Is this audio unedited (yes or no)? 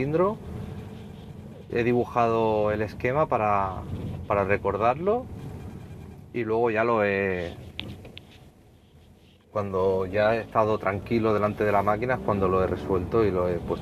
yes